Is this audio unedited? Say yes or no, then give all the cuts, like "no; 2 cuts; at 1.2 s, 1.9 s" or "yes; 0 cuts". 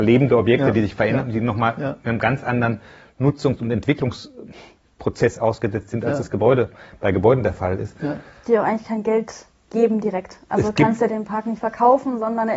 yes; 0 cuts